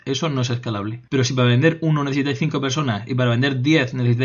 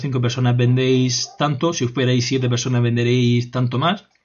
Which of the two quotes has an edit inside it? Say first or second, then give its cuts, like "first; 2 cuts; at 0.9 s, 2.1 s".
first; 1 cut; at 1.1 s